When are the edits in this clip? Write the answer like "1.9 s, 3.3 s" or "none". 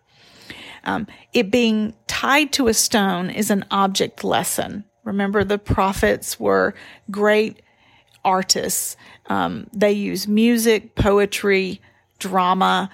none